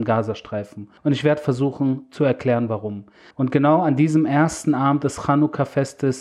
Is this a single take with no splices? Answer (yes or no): no